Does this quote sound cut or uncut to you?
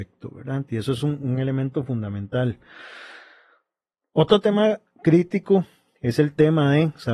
uncut